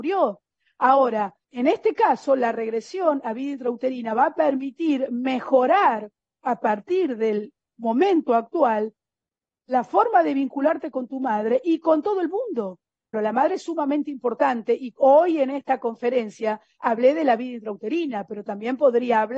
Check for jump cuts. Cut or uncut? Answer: cut